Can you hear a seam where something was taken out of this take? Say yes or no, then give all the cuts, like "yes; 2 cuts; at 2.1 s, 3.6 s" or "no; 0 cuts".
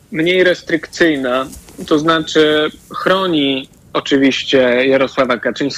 no; 0 cuts